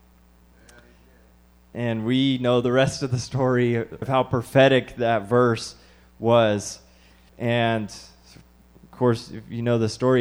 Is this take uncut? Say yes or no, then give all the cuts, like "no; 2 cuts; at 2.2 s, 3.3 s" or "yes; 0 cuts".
no; 2 cuts; at 4.0 s, 7.3 s